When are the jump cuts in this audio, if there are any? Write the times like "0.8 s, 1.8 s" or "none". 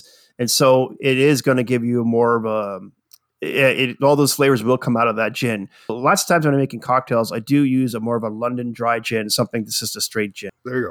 5.9 s